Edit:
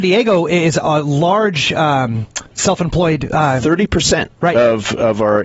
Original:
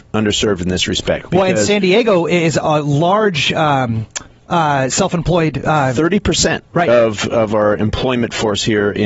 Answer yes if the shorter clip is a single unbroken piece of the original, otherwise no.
no